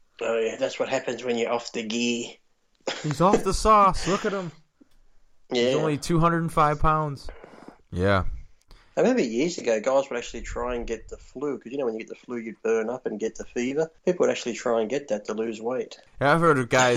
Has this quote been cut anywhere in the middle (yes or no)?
yes